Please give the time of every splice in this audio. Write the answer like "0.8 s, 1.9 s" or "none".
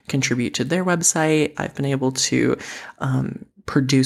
1.5 s